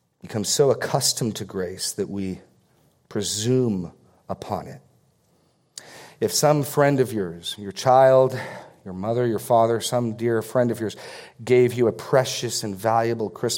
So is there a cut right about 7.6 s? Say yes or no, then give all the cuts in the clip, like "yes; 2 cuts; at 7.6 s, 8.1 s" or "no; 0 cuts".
no; 0 cuts